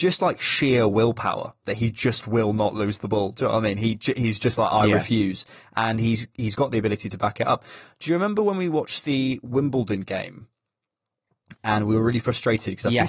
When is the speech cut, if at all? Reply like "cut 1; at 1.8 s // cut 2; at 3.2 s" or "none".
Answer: none